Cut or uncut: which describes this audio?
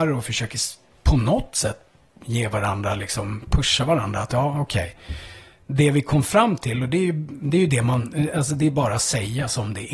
uncut